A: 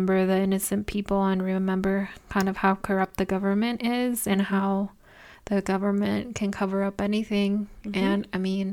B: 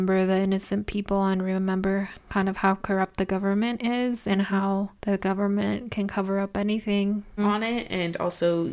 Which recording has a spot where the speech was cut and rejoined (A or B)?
B